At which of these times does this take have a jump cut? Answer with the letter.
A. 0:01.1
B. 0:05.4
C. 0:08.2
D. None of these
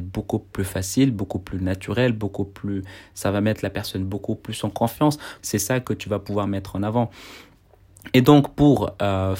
B